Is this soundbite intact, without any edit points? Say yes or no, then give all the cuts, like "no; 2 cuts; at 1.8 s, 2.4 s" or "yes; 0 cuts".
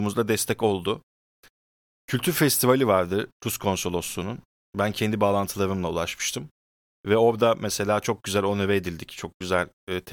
yes; 0 cuts